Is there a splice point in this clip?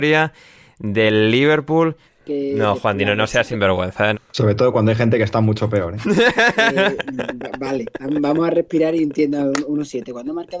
yes; 2 cuts; at 2.1 s, 4.1 s

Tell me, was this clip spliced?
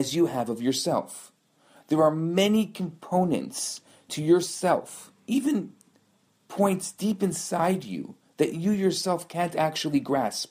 yes; 1 cut; at 5.2 s

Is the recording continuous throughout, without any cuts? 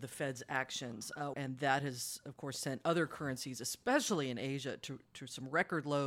no; 1 cut; at 1.3 s

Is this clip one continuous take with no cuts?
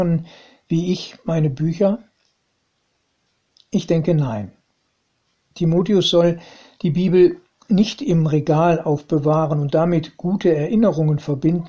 yes; 0 cuts

